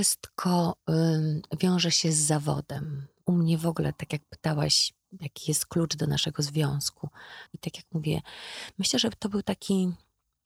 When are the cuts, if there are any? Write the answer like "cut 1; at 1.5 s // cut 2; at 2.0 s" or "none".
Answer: cut 1; at 7.5 s